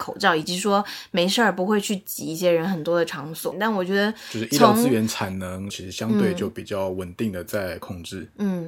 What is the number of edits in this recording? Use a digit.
2